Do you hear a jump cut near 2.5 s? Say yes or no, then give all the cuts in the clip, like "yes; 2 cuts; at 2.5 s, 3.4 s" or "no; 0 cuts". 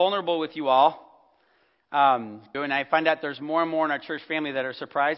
yes; 1 cut; at 2.5 s